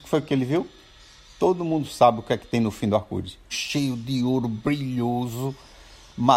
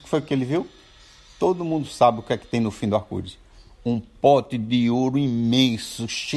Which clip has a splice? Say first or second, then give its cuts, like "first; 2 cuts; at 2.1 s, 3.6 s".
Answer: first; 1 cut; at 3.5 s